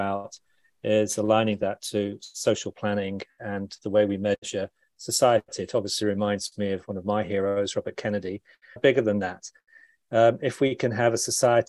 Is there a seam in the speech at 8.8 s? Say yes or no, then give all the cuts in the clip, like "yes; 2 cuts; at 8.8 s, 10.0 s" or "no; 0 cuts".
yes; 1 cut; at 8.8 s